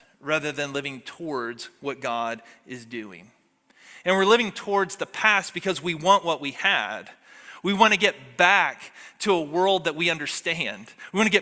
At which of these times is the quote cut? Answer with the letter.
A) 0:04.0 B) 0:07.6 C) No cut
C